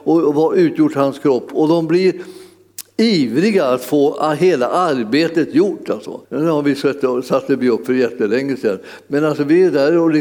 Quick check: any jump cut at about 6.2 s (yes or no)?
yes